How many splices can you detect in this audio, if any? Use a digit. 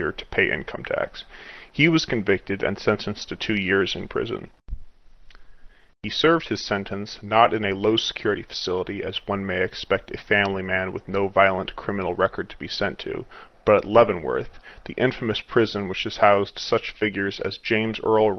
0